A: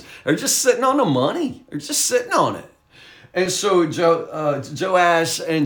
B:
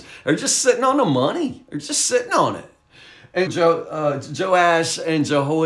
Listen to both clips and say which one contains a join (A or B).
B